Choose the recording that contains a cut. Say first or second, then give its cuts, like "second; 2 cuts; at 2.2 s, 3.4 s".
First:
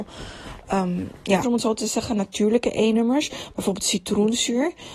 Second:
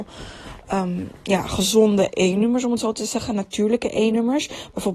first; 1 cut; at 1.4 s